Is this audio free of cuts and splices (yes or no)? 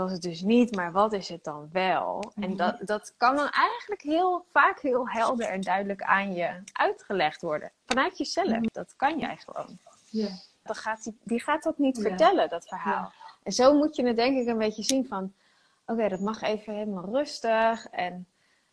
no